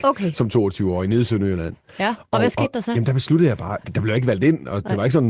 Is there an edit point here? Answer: no; 0 cuts

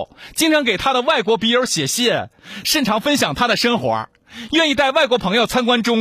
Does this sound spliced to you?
no; 0 cuts

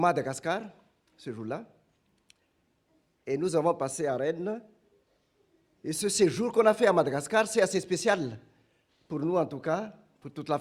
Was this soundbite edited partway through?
no; 0 cuts

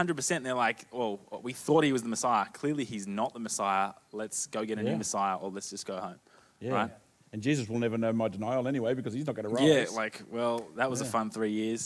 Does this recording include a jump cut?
no; 0 cuts

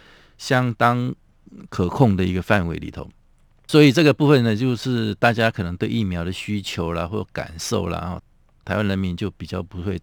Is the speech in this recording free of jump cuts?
yes; 0 cuts

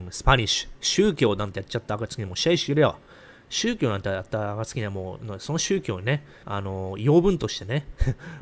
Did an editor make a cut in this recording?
no; 0 cuts

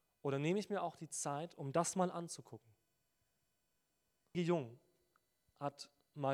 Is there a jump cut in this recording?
yes; 1 cut; at 4.3 s

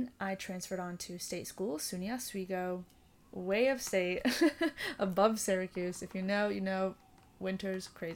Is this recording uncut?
yes; 0 cuts

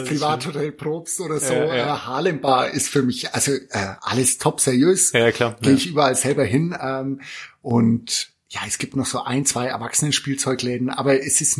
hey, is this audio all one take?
yes; 0 cuts

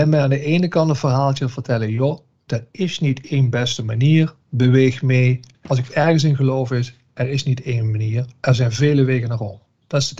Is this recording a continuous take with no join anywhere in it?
yes; 0 cuts

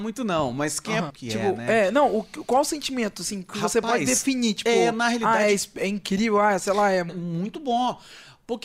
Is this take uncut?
no; 2 cuts; at 1.1 s, 7.1 s

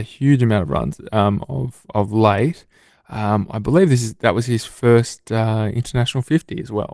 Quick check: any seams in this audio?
no; 0 cuts

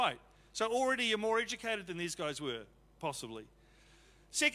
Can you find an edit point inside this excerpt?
no; 0 cuts

